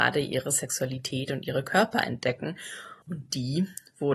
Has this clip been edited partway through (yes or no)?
yes